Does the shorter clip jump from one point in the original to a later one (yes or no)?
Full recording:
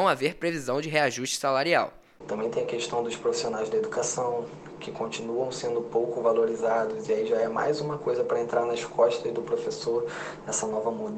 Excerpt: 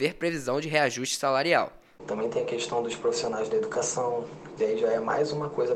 yes